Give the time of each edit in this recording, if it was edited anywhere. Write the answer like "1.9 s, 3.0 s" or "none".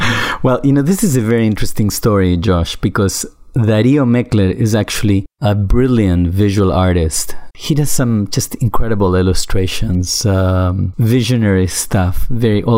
7.5 s